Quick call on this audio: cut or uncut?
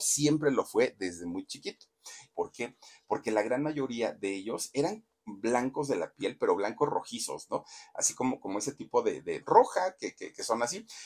cut